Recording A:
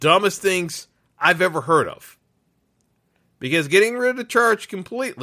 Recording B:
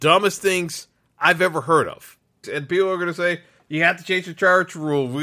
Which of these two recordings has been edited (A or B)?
B